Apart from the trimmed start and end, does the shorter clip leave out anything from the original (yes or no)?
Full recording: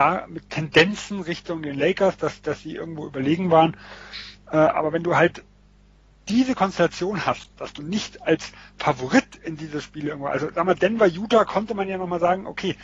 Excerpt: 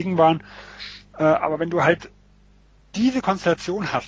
no